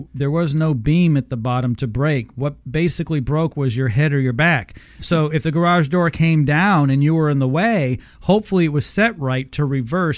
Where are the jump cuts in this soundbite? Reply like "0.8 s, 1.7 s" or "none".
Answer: none